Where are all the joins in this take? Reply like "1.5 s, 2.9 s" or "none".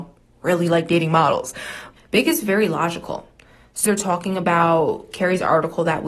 2.0 s, 3.9 s